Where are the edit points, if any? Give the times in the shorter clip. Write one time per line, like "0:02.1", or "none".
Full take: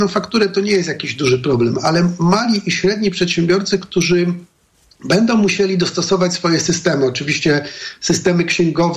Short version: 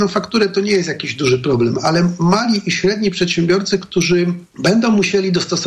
0:04.5

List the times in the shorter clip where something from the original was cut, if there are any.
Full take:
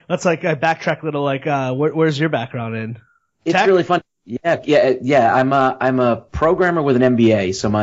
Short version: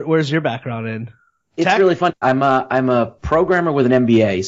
0:02.2

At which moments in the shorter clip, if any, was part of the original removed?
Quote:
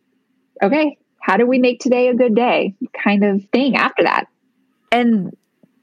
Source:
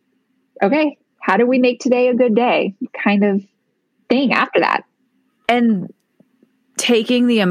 0:03.5

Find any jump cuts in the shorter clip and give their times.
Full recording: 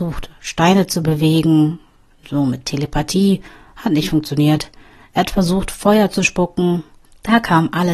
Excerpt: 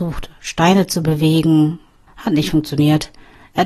0:02.1

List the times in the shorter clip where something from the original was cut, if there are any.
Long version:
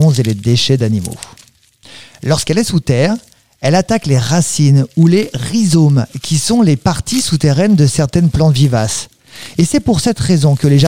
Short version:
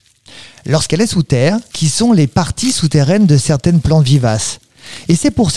0:01.7

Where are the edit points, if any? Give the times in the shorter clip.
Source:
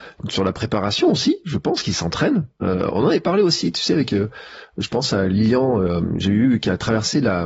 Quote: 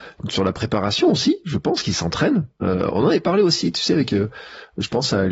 none

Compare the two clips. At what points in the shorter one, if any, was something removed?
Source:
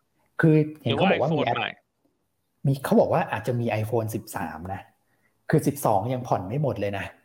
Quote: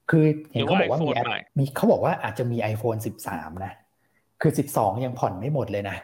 0:01.5

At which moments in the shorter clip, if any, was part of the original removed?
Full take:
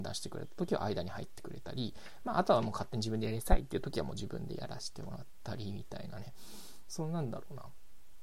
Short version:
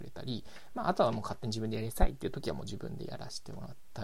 none

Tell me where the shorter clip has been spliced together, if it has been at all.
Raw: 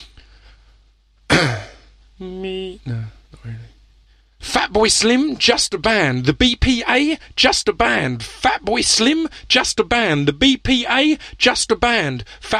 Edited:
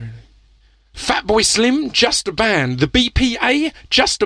none

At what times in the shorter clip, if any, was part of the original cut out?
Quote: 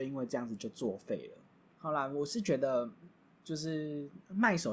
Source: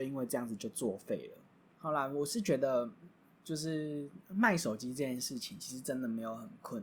none

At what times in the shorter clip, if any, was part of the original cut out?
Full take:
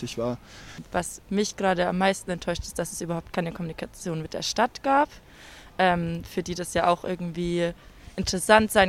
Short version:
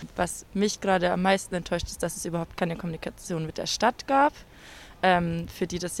none

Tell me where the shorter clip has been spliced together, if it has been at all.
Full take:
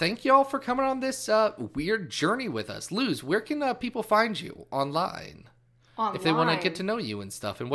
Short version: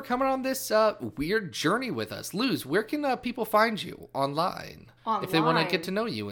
0:05.0

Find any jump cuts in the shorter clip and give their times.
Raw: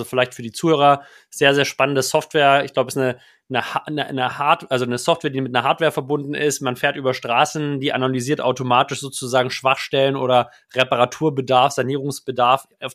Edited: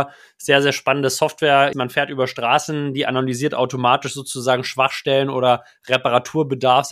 0:01.7

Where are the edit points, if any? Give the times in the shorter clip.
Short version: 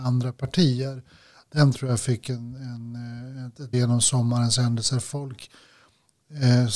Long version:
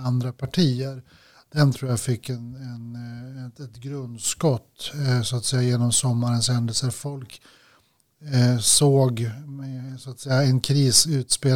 0:03.7

